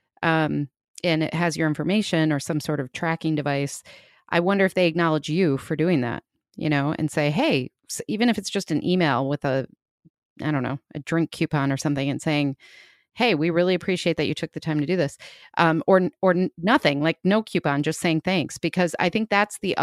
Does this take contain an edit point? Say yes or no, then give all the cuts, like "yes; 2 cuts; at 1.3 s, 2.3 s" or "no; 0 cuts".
no; 0 cuts